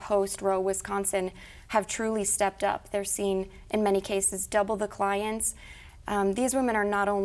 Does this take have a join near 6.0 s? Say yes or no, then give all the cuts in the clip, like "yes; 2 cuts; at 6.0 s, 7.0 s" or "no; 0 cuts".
yes; 1 cut; at 6.0 s